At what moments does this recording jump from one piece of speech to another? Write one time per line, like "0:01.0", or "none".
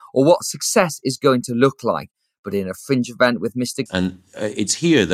0:03.9